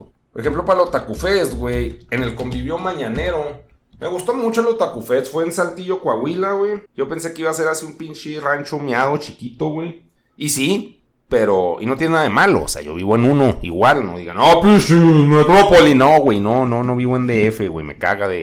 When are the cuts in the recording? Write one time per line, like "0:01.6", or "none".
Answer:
0:06.9